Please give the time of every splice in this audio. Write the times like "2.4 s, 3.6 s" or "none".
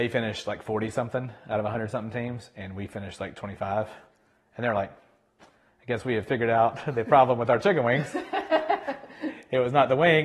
none